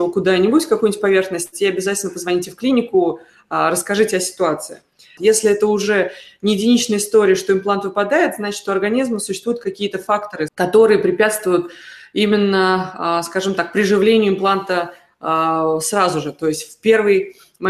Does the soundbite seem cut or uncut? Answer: cut